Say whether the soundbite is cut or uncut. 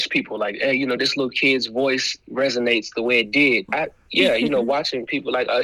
cut